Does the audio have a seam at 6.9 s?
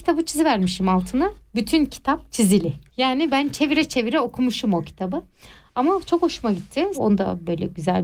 yes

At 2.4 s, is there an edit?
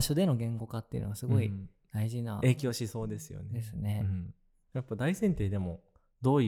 no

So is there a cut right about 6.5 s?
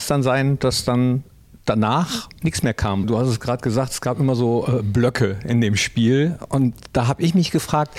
no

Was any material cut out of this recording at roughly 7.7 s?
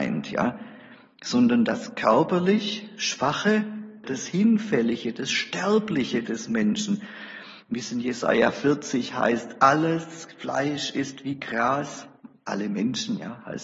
no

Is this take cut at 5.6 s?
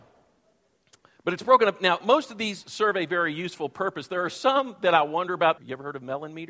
yes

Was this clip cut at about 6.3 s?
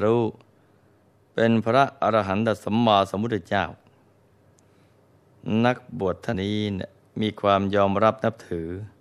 yes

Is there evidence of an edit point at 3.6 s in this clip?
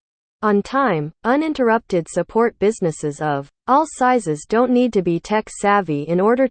yes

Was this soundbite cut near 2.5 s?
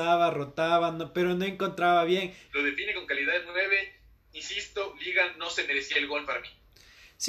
yes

